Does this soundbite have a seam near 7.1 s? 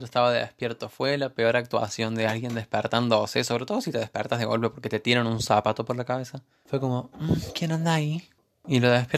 yes; 1 cut; at 7.1 s

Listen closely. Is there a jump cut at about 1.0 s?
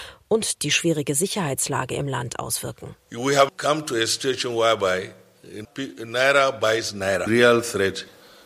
no; 3 cuts; at 3.5 s, 5.6 s, 7.3 s

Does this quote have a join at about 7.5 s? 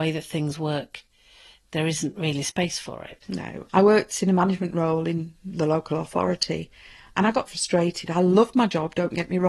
yes; 1 cut; at 7.5 s

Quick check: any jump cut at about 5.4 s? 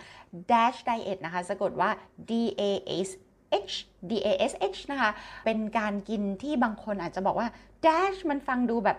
yes; 1 cut; at 5.4 s

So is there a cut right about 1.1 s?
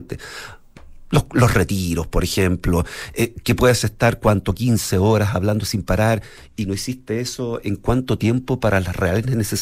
no; 0 cuts

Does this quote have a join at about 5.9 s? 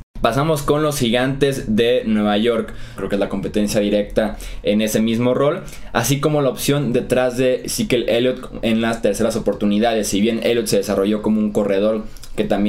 no; 1 cut; at 3.0 s

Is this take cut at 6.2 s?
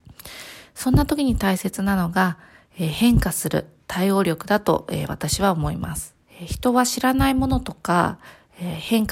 yes; 1 cut; at 6.2 s

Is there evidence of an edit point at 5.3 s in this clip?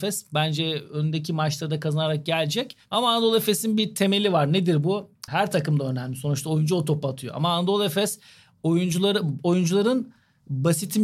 yes; 1 cut; at 5.3 s

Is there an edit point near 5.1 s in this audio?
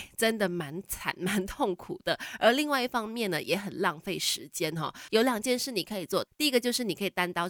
yes; 1 cut; at 5.1 s

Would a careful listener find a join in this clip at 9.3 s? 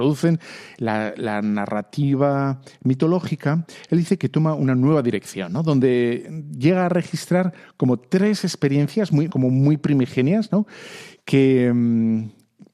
yes; 1 cut; at 9.3 s

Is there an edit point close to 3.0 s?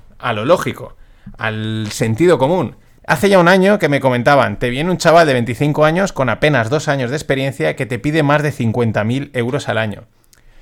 yes; 1 cut; at 3.0 s

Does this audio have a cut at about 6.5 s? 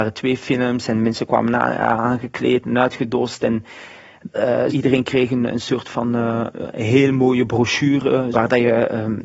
yes; 3 cuts; at 4.7 s, 6.5 s, 8.3 s

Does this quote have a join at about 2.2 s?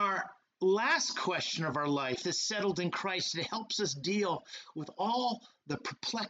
yes; 1 cut; at 2.2 s

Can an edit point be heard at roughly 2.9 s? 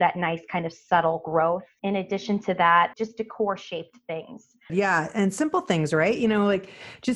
yes; 2 cuts; at 2.9 s, 4.7 s

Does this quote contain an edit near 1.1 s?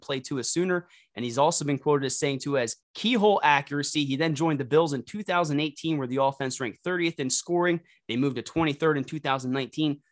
no; 1 cut; at 2.8 s

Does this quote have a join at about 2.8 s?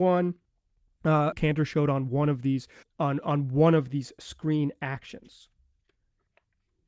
yes; 2 cuts; at 1.3 s, 2.8 s

